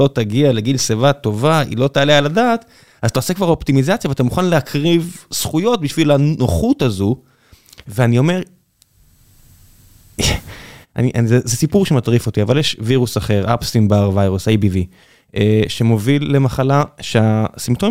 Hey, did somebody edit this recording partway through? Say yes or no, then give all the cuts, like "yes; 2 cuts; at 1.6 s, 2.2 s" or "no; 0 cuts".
no; 0 cuts